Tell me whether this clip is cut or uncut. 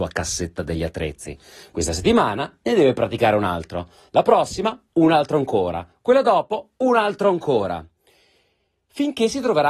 uncut